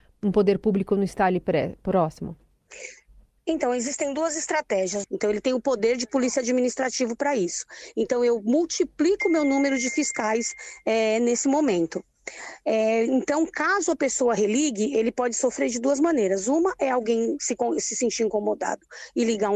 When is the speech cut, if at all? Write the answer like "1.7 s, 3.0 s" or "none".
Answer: 5.0 s